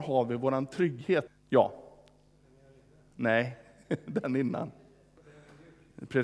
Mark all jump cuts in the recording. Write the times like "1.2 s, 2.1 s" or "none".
1.3 s